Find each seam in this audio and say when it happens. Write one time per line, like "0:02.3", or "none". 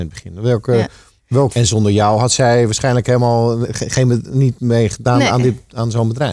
0:01.5
0:03.7